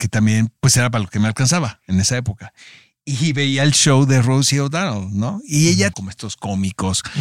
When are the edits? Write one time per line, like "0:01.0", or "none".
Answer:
0:05.9